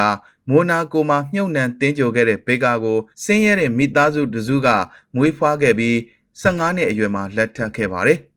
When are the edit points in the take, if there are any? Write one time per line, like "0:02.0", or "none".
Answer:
0:03.1